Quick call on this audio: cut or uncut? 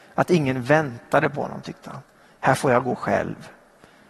uncut